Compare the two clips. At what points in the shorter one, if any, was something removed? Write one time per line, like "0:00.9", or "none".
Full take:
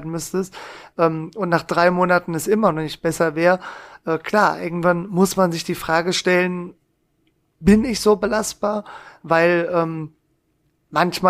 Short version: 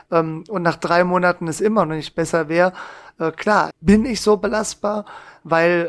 0:03.7